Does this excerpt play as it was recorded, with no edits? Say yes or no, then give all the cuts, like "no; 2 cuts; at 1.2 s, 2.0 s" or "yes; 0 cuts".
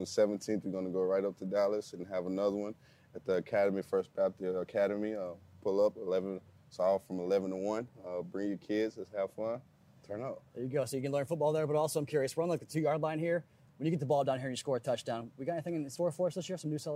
yes; 0 cuts